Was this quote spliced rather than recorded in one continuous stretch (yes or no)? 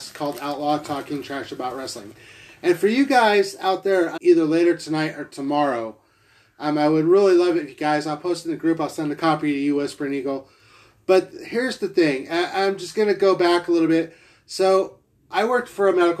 yes